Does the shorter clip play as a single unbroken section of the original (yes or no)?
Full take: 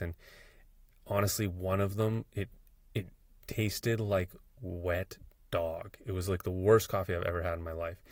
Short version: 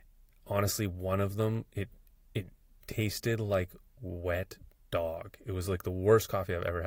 yes